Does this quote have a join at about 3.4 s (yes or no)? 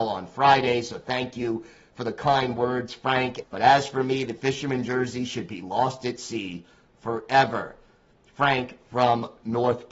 yes